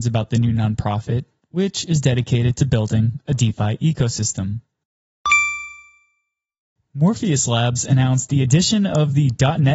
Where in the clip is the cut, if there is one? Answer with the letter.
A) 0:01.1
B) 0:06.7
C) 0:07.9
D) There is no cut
D